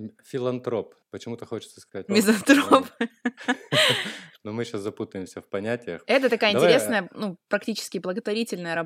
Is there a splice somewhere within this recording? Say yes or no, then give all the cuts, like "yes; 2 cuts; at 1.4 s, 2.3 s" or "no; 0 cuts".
yes; 1 cut; at 2.1 s